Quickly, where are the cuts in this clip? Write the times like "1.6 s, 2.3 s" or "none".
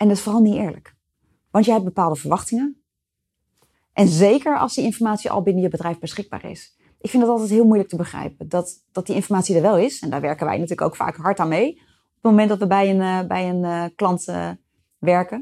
3.7 s